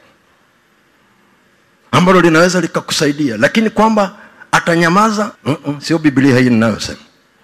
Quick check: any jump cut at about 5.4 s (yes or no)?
yes